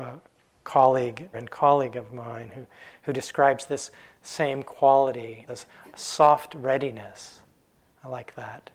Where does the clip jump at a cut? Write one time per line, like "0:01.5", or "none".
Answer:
0:01.3
0:05.5

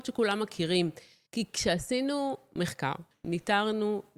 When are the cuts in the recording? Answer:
0:01.3
0:03.1

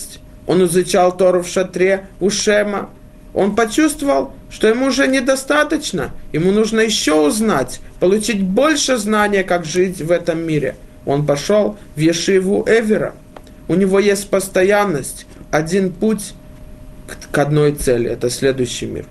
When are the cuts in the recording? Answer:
0:15.4

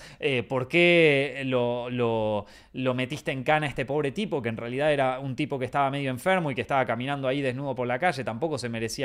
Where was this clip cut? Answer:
none

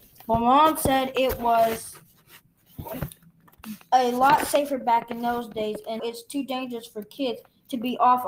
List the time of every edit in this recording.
0:06.0

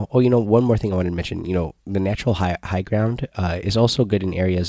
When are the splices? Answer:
none

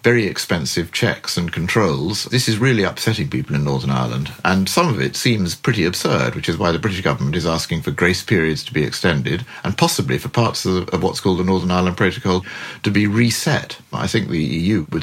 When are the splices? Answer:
none

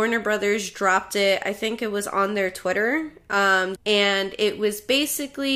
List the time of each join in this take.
0:03.8

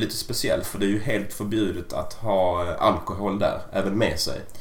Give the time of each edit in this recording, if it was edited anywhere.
none

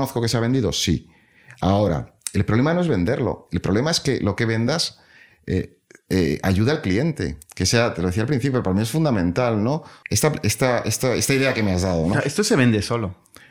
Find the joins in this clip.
0:10.0
0:12.1

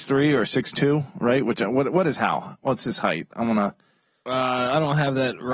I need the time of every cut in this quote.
none

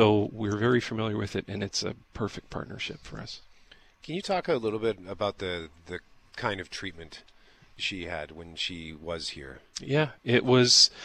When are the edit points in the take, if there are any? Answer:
none

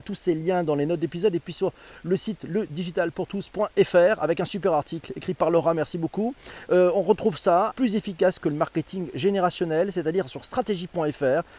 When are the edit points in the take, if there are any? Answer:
0:07.7

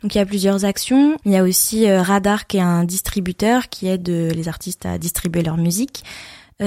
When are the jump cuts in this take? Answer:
0:01.2

